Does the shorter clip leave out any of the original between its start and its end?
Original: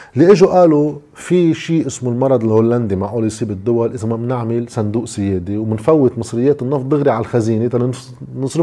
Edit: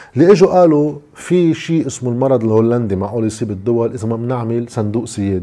no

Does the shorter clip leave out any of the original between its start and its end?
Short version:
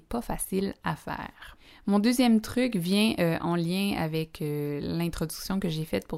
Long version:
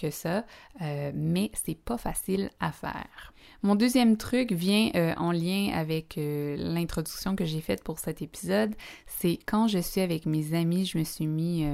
no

